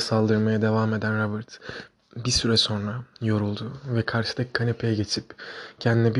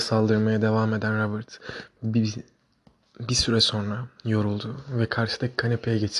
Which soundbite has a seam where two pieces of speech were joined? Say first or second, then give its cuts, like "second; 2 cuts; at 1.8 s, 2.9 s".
first; 1 cut; at 1.9 s